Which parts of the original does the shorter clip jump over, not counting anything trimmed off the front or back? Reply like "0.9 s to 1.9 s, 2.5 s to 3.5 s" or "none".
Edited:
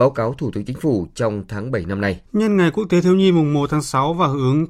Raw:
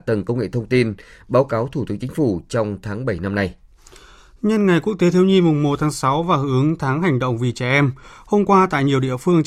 3.6 s to 4.4 s